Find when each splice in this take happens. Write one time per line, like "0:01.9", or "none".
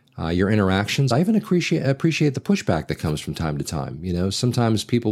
none